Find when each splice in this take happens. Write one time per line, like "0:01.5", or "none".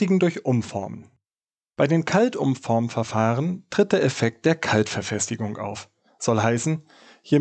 none